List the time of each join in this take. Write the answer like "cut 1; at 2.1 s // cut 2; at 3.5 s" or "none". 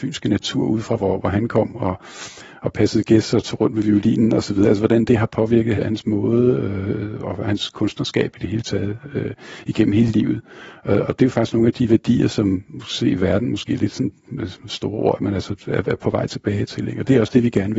cut 1; at 5.8 s